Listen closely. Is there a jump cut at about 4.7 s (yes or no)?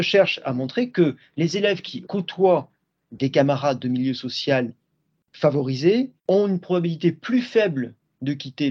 no